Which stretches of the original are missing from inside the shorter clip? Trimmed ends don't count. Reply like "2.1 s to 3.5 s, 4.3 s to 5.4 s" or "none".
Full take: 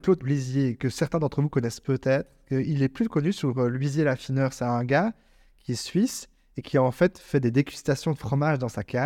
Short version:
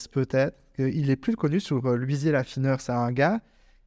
none